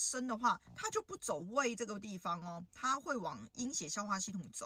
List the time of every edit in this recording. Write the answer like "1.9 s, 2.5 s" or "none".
none